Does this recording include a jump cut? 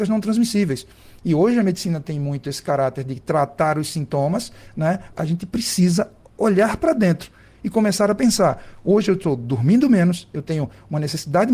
yes; 1 cut; at 5.1 s

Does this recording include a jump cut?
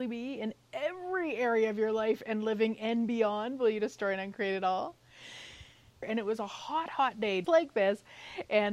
yes; 2 cuts; at 6.0 s, 7.4 s

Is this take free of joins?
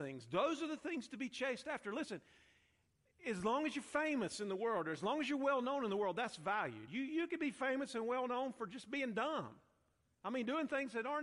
yes; 0 cuts

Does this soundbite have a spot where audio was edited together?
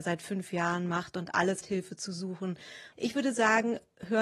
yes; 2 cuts; at 1.6 s, 2.9 s

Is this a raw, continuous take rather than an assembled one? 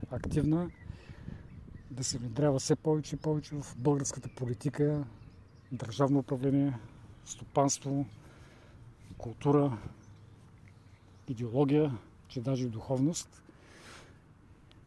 yes; 0 cuts

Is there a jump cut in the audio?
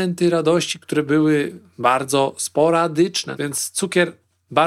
yes; 1 cut; at 3.4 s

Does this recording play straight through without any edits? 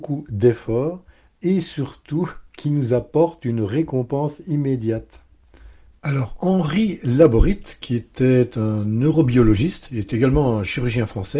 no; 1 cut; at 6.0 s

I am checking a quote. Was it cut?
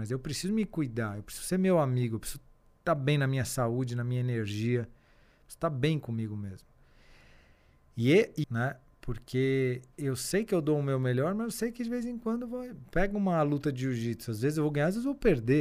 yes; 1 cut; at 8.4 s

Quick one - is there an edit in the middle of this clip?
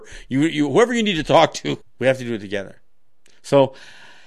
yes; 1 cut; at 1.8 s

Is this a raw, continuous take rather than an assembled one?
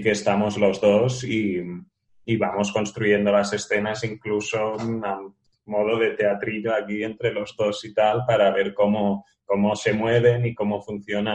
yes; 0 cuts

